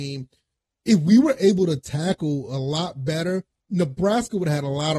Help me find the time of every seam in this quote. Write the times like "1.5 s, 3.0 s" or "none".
none